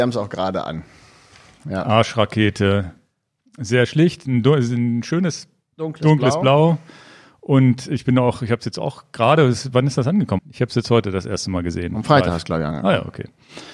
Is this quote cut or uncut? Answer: cut